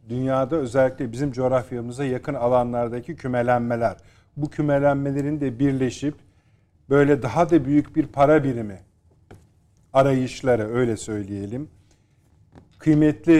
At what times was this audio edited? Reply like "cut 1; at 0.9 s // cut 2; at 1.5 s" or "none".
none

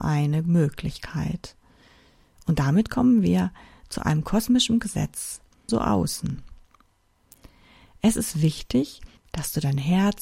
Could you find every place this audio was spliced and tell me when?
cut 1; at 5.7 s // cut 2; at 9.2 s

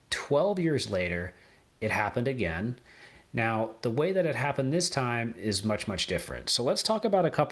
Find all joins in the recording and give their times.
none

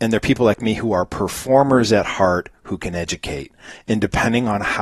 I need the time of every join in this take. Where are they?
none

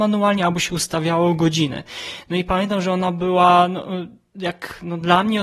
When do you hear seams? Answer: none

